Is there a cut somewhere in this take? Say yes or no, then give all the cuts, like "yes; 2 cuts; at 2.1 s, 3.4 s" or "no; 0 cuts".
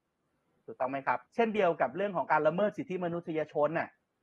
yes; 1 cut; at 1.3 s